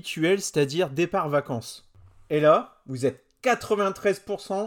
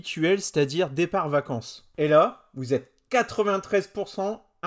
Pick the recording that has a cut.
second; 1 cut; at 1.9 s

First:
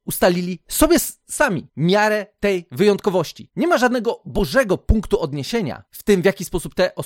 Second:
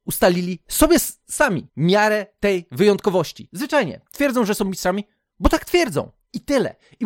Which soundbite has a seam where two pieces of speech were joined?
second; 1 cut; at 3.5 s

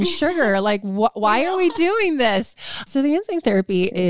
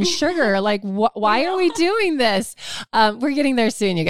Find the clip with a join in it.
first; 1 cut; at 2.9 s

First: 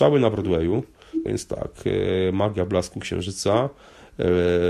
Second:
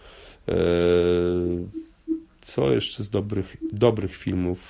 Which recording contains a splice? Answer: first; 1 cut; at 1.3 s

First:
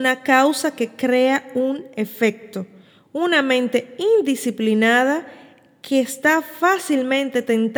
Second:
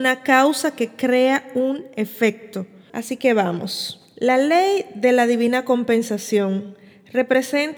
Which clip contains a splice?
second; 1 cut; at 2.9 s

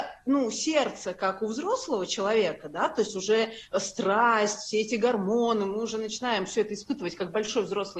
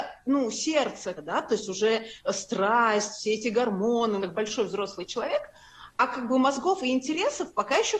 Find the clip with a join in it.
second; 2 cuts; at 1.1 s, 4.2 s

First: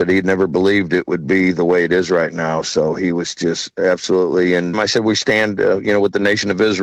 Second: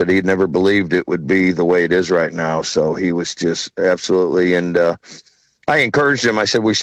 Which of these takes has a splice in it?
first; 1 cut; at 4.7 s

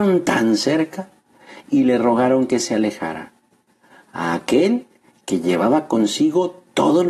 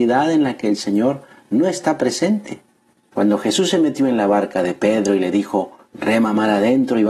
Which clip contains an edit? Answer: second; 1 cut; at 3.1 s

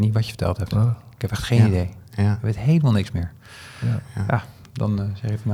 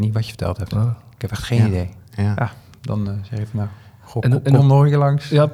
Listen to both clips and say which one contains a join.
second; 2 cuts; at 2.4 s, 4.6 s

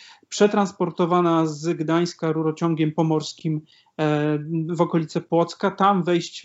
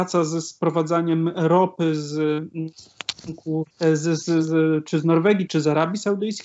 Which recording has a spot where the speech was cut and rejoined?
second; 2 cuts; at 3.7 s, 5.5 s

